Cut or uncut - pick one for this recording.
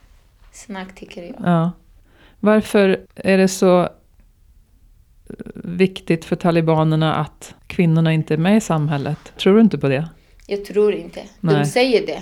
cut